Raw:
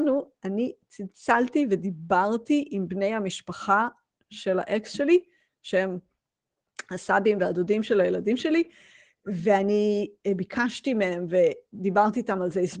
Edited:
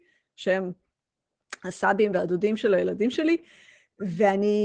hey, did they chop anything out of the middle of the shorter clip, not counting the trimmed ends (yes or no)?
no